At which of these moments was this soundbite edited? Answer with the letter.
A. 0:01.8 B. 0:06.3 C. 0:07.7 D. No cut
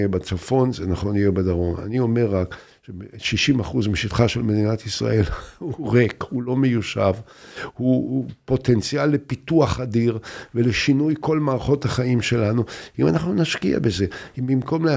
D